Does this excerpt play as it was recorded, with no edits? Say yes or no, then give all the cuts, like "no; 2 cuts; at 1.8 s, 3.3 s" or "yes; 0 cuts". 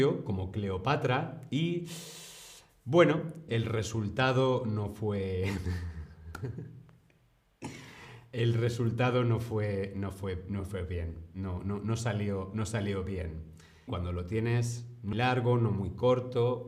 no; 3 cuts; at 3.5 s, 13.9 s, 15.1 s